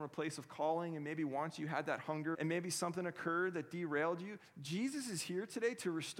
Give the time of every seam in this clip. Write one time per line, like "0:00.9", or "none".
0:02.3